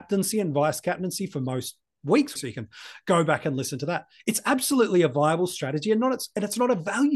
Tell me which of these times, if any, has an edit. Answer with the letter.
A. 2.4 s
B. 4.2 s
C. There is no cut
A